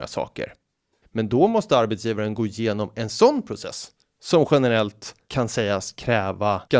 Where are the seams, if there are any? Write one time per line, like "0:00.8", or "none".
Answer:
0:01.0